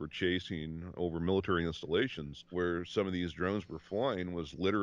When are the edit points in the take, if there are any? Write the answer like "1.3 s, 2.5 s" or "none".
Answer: 2.5 s